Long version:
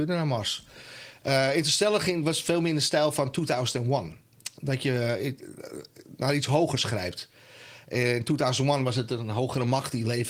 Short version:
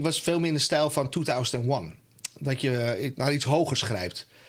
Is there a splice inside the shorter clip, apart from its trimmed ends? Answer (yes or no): yes